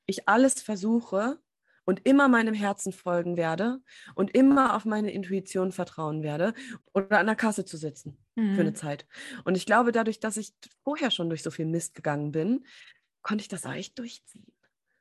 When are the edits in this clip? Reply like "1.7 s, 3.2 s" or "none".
6.8 s